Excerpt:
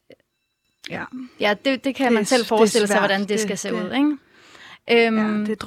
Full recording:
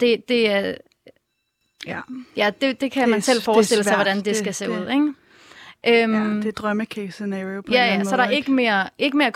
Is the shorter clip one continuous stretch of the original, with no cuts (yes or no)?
yes